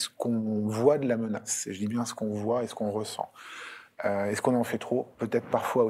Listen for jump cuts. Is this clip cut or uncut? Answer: uncut